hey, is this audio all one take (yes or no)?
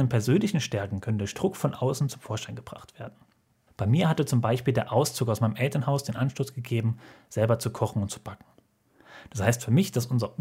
no